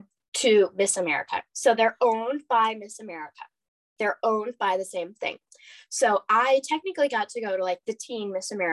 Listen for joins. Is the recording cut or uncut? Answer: uncut